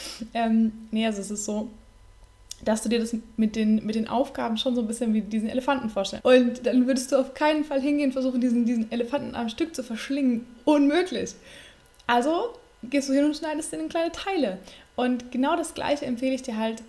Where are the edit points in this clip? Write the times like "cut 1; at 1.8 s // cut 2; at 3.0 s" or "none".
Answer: cut 1; at 6.2 s